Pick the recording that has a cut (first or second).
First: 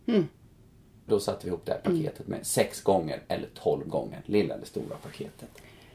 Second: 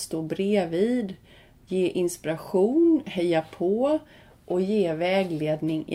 first